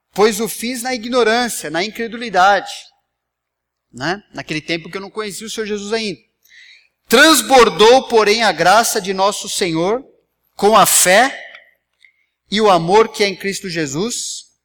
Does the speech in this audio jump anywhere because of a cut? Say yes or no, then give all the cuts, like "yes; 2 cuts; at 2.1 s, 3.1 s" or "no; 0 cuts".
no; 0 cuts